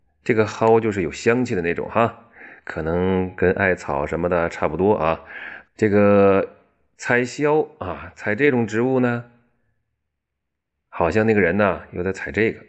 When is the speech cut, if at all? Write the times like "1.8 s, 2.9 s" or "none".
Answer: 5.6 s